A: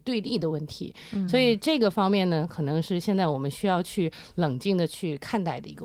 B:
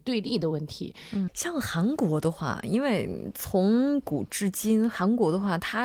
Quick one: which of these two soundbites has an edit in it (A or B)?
B